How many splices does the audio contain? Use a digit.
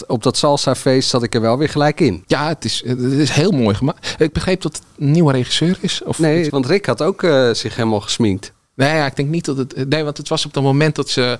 1